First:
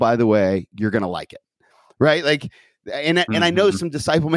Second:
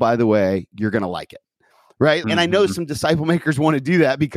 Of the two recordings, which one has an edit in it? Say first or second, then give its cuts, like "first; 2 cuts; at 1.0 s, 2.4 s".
second; 1 cut; at 2.2 s